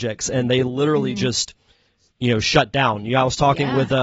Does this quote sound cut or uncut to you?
uncut